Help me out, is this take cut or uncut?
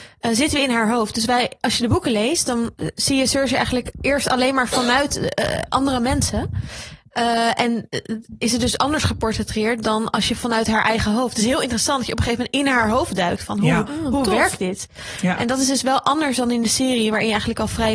uncut